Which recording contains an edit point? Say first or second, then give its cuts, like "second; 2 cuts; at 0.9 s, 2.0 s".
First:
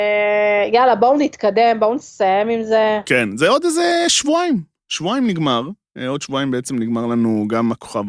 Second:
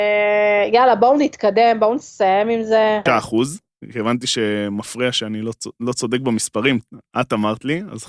second; 1 cut; at 3.1 s